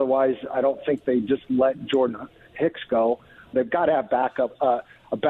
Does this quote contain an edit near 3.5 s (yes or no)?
yes